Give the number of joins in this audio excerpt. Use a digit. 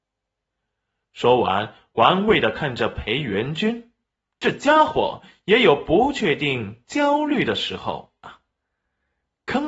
1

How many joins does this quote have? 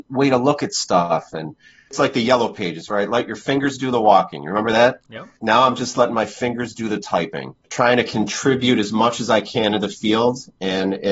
0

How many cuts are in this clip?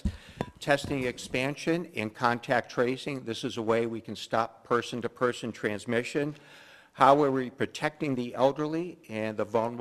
0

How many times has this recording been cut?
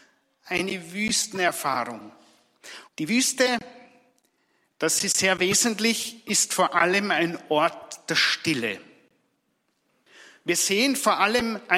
1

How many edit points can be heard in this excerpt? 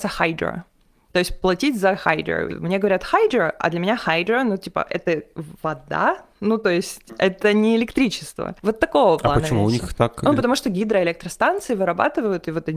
1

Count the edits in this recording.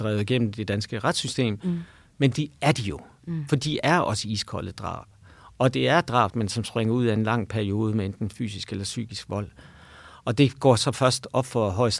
2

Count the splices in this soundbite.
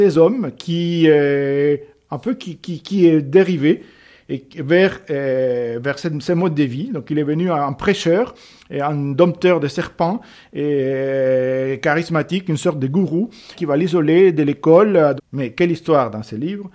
2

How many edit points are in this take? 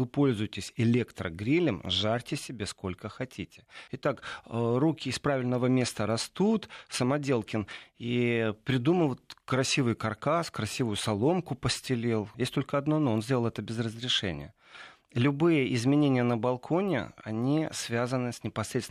2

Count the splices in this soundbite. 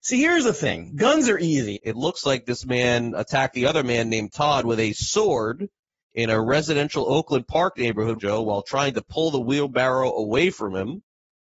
2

